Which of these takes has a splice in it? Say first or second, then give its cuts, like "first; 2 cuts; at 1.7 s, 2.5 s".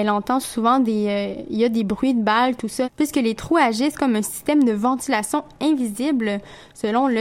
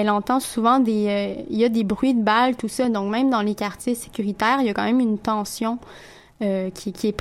first; 1 cut; at 2.8 s